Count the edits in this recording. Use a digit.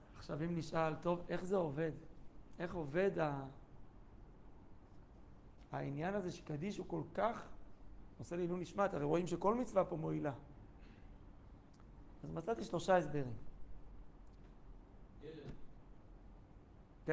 1